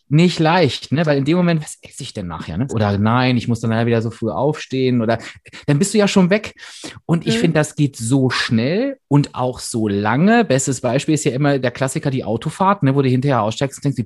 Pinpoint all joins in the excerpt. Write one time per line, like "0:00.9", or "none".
0:01.6
0:02.7